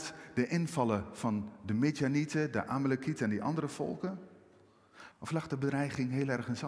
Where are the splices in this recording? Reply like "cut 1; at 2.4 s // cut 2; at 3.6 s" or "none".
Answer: cut 1; at 5.1 s